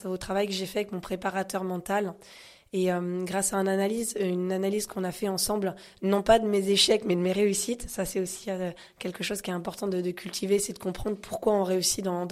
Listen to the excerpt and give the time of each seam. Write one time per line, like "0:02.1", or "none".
none

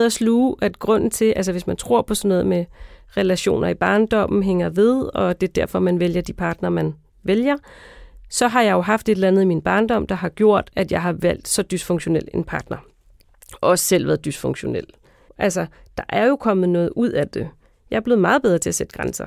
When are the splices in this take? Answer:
0:15.3

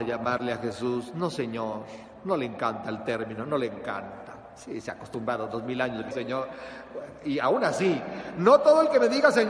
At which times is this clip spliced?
0:06.1

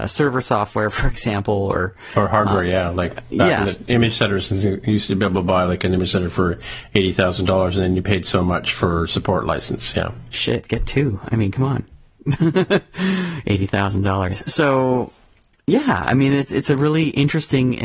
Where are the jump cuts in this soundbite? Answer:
none

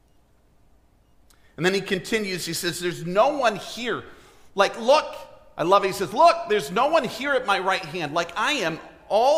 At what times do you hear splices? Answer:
none

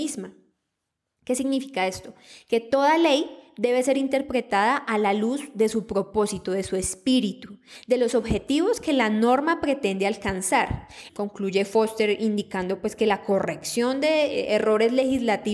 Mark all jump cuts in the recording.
0:11.1

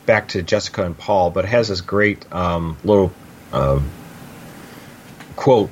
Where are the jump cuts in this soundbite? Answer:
none

